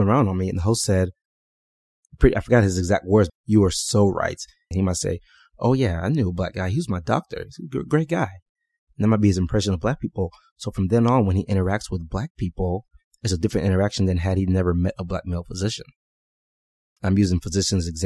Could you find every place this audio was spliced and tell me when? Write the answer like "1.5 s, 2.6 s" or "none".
3.3 s, 4.7 s